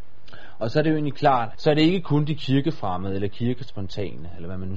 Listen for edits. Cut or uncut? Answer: cut